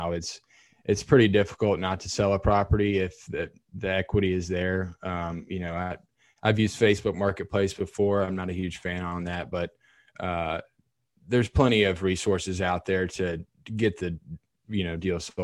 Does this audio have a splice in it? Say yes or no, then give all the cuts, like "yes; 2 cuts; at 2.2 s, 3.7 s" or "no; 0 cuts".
no; 0 cuts